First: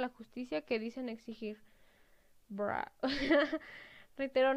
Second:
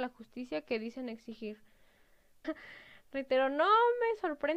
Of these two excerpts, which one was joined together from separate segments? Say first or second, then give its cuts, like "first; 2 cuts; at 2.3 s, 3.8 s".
second; 1 cut; at 2.4 s